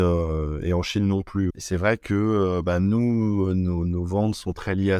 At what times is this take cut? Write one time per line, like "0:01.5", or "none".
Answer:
0:01.5